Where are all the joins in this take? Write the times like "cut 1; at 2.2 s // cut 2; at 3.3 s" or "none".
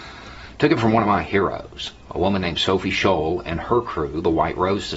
none